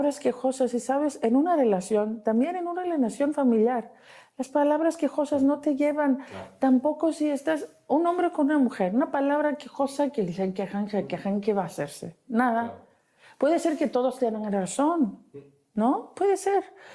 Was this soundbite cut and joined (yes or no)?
no